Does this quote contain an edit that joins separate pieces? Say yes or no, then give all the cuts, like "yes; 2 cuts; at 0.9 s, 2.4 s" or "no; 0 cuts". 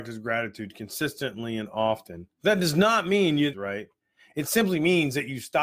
yes; 2 cuts; at 2.3 s, 3.5 s